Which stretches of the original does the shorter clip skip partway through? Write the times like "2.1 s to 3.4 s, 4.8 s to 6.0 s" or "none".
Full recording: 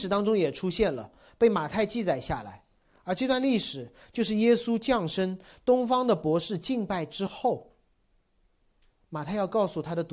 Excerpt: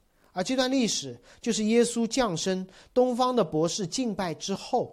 none